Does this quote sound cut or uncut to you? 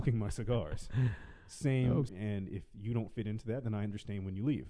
cut